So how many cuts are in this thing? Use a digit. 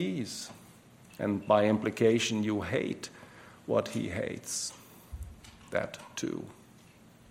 0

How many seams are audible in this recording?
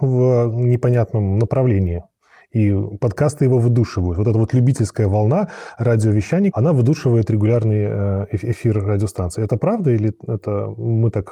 1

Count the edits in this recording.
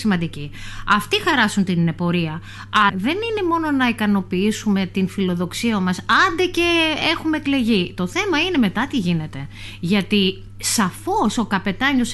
1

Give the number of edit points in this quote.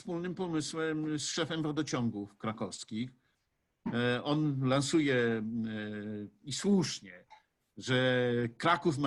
0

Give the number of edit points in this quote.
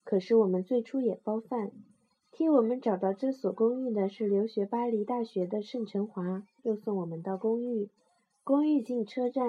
1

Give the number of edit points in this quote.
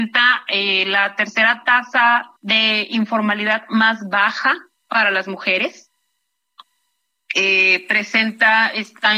1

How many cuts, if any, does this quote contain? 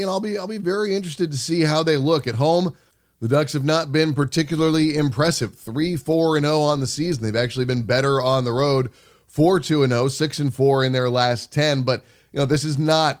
0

